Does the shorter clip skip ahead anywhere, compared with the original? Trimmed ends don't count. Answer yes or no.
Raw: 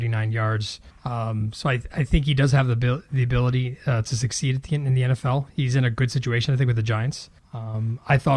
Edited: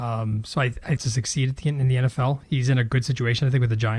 yes